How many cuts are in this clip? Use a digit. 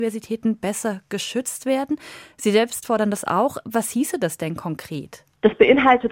0